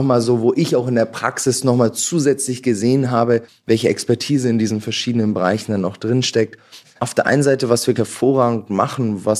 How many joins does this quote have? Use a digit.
2